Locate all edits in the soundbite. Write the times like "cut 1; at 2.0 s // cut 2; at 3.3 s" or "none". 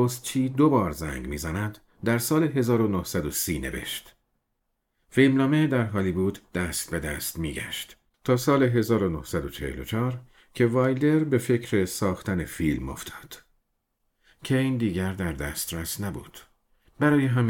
cut 1; at 8.1 s